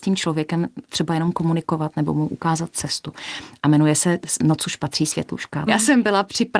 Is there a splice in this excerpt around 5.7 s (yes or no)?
yes